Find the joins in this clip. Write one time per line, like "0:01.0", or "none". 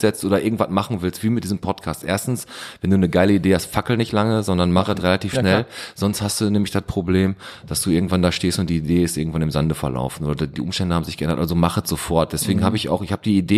none

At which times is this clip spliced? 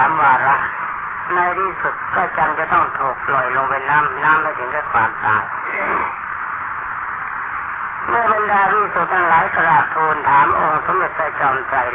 0:04.2

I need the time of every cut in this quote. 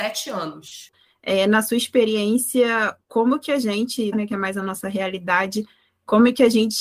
0:00.9
0:04.1

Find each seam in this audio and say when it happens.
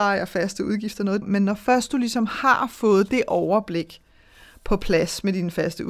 0:01.2

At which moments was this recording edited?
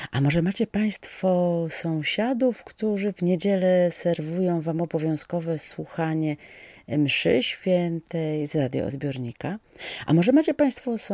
none

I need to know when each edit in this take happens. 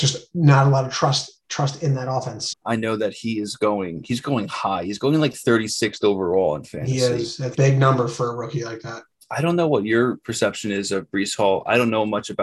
0:02.5
0:07.5

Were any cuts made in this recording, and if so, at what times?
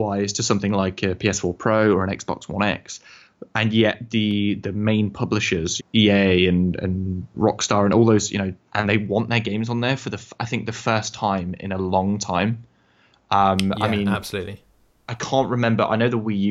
0:05.8
0:07.3
0:08.6

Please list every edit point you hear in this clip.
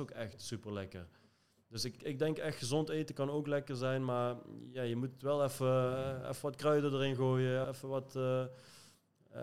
0:02.0
0:07.6

